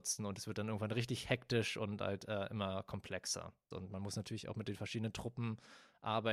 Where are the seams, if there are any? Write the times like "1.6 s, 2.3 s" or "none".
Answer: 3.7 s